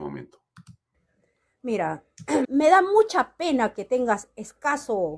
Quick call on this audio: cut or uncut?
cut